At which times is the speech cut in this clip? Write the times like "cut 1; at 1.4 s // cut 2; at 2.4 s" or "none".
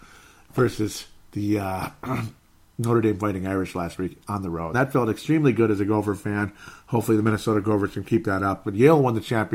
cut 1; at 4.7 s // cut 2; at 8.6 s